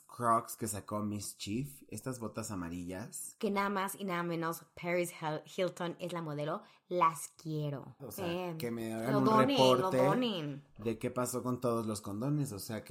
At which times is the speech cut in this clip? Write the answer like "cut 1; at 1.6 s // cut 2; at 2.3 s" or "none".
cut 1; at 8.0 s